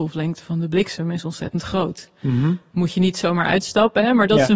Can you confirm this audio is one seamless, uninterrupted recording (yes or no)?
yes